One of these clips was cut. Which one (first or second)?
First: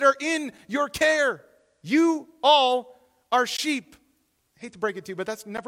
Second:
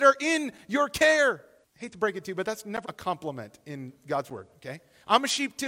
second